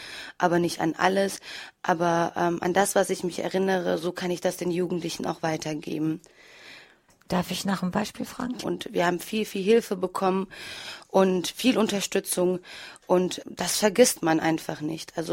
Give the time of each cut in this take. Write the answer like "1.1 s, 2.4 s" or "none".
8.6 s, 13.4 s